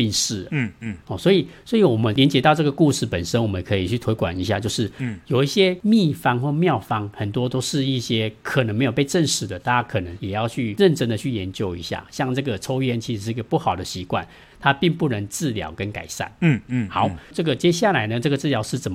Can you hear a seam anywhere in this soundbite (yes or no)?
no